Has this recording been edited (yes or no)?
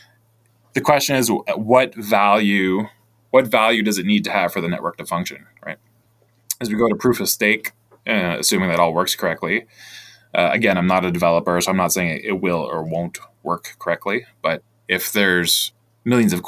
no